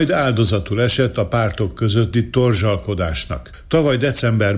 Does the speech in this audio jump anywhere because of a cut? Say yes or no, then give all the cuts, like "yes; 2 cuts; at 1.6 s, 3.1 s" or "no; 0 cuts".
no; 0 cuts